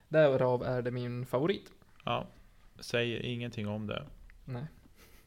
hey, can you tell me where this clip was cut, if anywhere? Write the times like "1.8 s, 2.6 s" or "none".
none